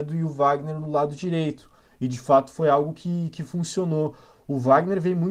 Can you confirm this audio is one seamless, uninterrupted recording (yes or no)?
yes